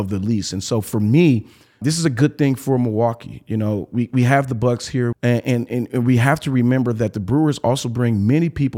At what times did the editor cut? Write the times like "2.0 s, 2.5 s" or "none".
1.8 s, 5.1 s

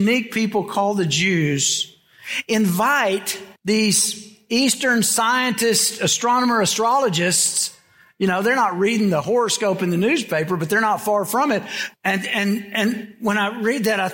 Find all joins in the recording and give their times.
3.6 s, 11.9 s

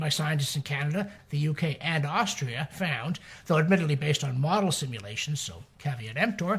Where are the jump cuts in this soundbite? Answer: 1.2 s

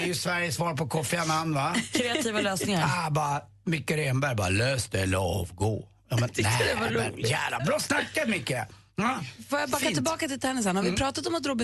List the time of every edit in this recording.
7.6 s

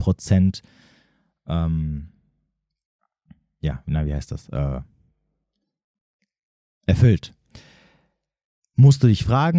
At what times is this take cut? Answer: none

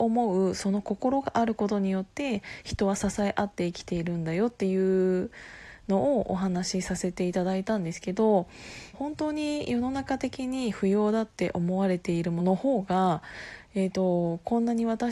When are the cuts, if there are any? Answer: 8.9 s, 12.4 s

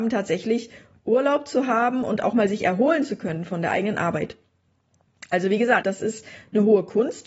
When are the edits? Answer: 5.8 s

